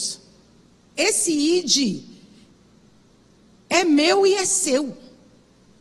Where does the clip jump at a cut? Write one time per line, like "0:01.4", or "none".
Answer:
0:00.9